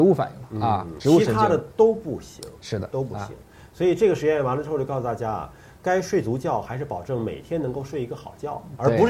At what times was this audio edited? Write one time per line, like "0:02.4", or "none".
none